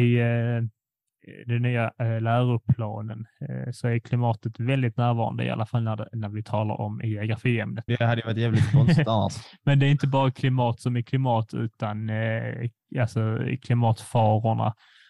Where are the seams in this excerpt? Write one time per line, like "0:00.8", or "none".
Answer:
0:07.9